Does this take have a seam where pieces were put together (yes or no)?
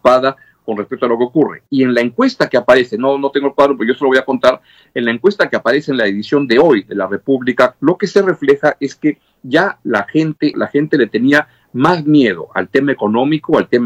yes